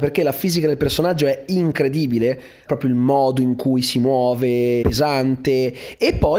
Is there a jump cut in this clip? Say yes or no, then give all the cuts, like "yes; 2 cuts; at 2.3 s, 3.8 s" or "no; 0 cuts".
yes; 2 cuts; at 2.7 s, 4.8 s